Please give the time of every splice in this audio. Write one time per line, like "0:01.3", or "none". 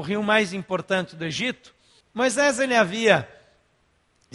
0:02.0